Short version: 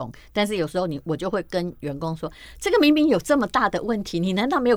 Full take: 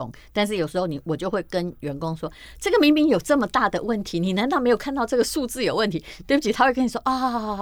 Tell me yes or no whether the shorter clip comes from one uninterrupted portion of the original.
yes